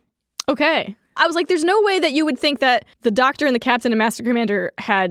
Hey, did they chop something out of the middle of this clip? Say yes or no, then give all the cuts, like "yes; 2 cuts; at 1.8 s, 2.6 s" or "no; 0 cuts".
yes; 2 cuts; at 1.2 s, 2.9 s